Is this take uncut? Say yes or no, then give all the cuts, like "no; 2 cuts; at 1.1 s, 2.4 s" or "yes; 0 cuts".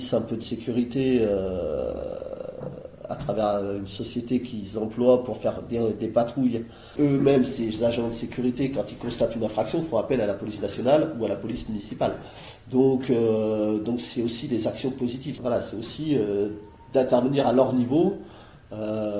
no; 1 cut; at 15.4 s